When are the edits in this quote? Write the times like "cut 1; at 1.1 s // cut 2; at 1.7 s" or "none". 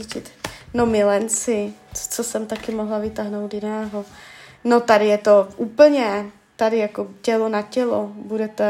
none